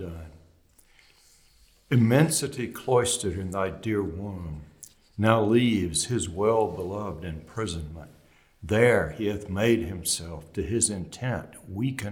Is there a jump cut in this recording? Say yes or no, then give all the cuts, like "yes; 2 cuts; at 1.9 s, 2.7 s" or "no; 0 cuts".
no; 0 cuts